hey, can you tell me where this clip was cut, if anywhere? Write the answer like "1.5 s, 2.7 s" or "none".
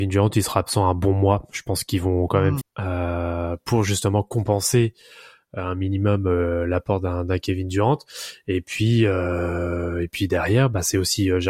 2.6 s